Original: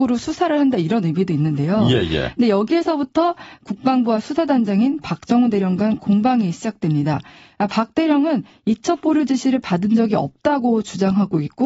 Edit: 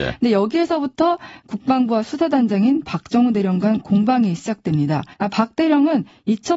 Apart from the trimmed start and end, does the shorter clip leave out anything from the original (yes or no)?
yes